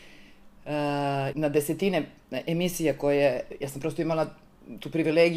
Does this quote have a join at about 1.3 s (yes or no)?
yes